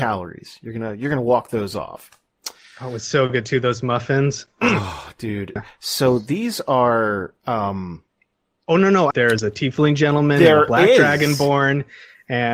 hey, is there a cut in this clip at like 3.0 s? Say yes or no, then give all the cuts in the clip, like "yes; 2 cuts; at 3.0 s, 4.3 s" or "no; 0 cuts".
no; 2 cuts; at 5.6 s, 9.1 s